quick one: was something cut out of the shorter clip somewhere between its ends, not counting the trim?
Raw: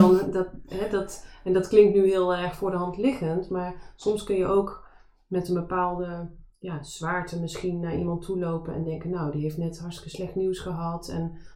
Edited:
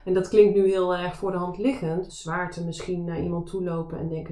yes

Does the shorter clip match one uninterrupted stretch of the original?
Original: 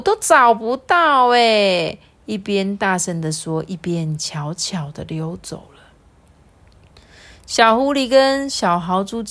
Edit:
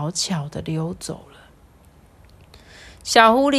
yes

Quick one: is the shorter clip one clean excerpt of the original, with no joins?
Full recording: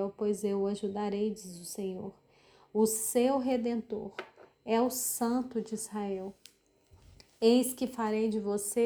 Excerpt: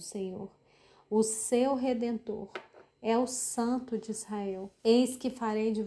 no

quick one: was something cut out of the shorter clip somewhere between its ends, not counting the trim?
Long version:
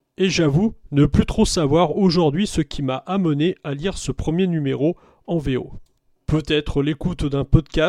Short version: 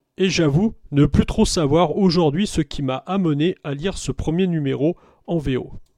no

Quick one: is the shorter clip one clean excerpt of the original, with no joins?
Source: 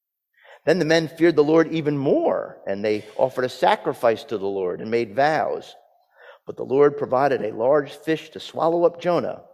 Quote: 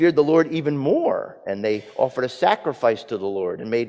yes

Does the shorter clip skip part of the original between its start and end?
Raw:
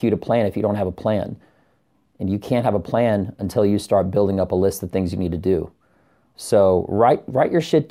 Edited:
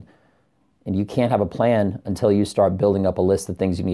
no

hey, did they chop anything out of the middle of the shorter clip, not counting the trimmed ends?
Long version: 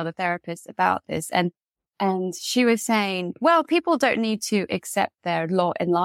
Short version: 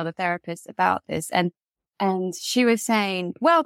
no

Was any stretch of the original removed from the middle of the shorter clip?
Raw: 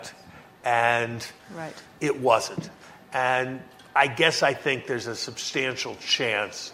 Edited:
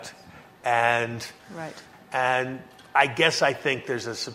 yes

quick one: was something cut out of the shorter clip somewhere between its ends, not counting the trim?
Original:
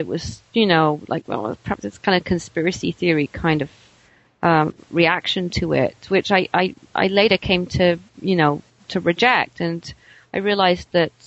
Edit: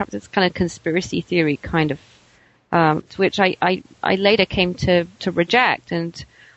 yes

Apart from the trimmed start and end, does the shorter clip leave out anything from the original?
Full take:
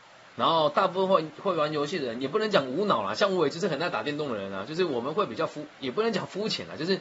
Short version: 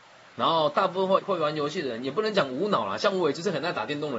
yes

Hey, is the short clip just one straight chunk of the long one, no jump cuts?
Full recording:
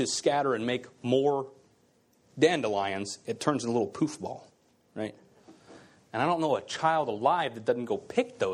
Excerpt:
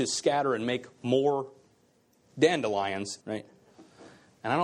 no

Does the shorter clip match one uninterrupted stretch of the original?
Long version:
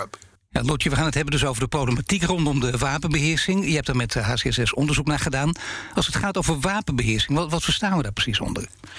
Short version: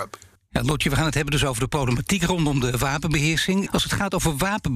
no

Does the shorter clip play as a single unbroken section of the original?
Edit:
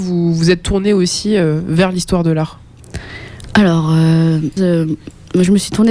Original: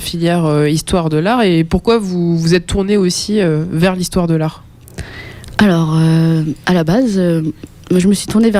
no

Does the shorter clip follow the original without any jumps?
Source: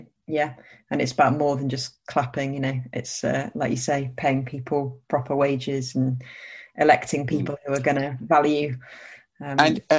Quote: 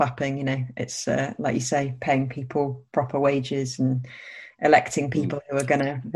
yes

